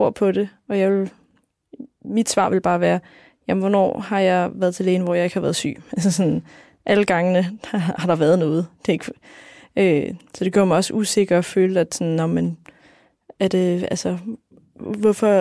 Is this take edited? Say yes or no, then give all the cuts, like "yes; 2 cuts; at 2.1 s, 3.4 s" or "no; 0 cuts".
no; 0 cuts